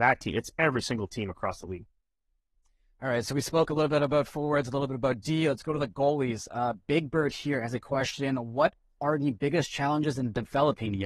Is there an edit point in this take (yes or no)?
no